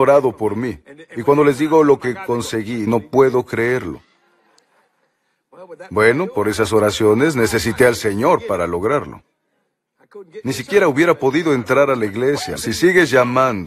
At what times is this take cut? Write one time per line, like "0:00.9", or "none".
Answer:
0:02.9
0:12.6